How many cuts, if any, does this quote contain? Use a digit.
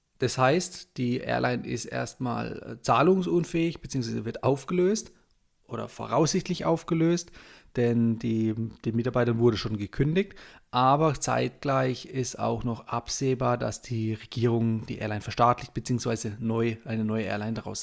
0